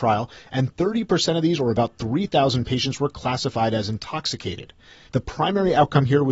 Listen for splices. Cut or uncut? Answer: cut